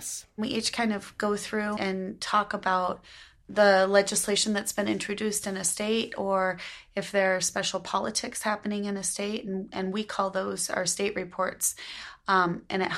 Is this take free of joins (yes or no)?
no